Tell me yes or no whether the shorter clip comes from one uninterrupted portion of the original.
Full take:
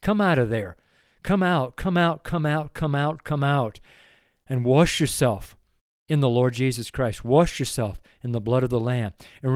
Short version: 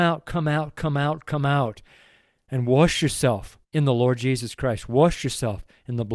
no